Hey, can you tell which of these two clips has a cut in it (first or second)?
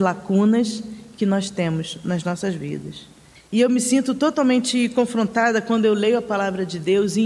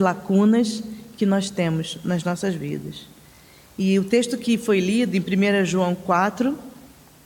first